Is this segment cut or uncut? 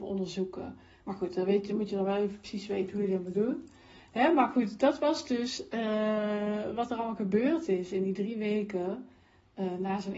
uncut